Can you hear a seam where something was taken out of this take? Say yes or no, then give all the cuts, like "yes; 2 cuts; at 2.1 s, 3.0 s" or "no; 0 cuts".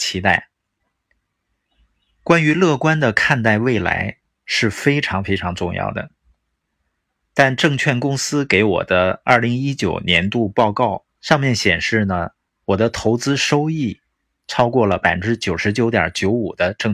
yes; 2 cuts; at 7.2 s, 11.1 s